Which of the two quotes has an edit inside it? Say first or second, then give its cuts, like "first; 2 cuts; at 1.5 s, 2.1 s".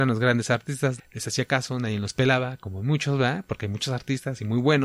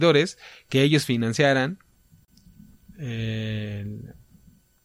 first; 1 cut; at 1.0 s